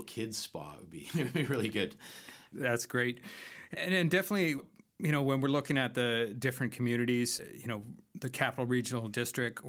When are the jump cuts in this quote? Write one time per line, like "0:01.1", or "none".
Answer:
none

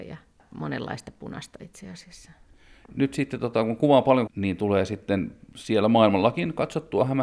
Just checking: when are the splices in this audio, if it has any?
0:02.9
0:04.3

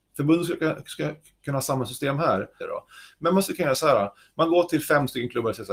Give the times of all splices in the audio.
0:02.6

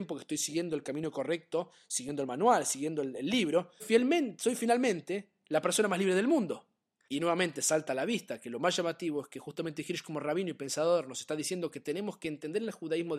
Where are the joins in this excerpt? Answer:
0:03.8
0:07.0

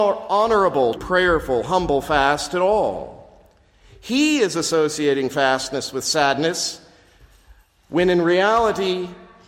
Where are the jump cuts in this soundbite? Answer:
0:00.9

